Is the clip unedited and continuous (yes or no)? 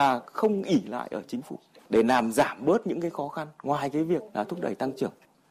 no